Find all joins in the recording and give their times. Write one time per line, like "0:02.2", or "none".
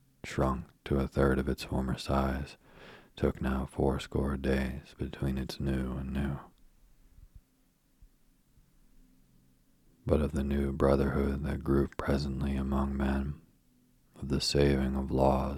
none